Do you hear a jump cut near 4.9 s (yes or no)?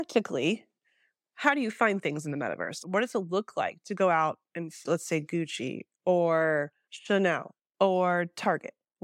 yes